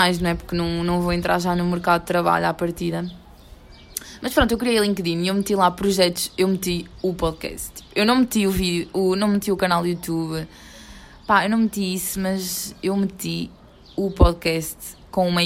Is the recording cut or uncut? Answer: uncut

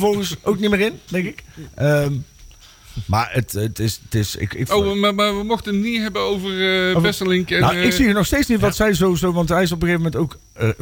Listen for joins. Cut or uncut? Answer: uncut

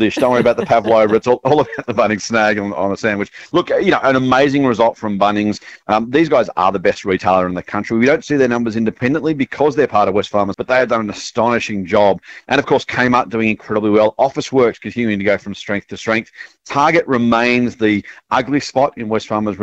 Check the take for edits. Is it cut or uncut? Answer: cut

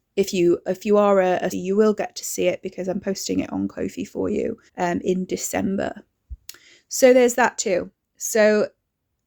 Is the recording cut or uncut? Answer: cut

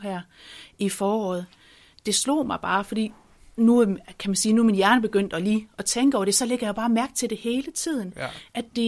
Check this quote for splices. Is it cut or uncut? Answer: uncut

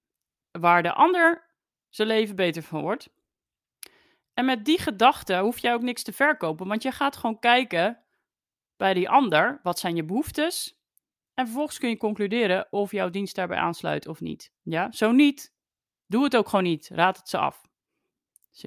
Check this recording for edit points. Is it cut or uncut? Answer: cut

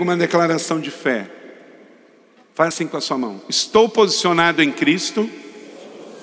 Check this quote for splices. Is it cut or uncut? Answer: uncut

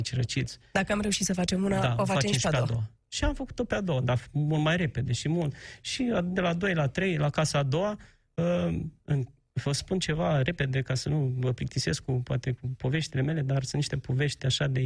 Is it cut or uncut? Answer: uncut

